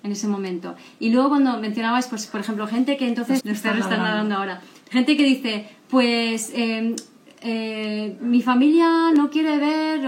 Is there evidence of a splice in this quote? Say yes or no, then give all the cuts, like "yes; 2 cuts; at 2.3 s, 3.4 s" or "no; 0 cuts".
yes; 1 cut; at 3.4 s